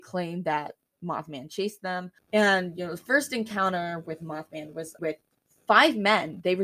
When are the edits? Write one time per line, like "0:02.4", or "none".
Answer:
0:02.2
0:05.0